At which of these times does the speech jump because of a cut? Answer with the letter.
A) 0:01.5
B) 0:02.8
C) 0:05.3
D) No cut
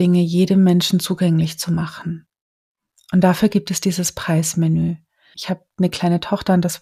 C